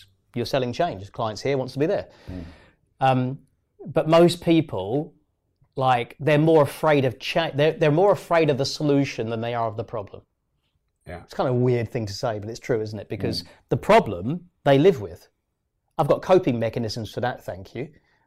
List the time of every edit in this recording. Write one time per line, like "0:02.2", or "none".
none